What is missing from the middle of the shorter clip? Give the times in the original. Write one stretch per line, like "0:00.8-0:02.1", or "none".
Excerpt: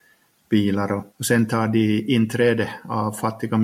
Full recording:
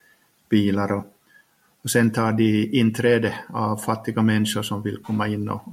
0:01.1-0:01.7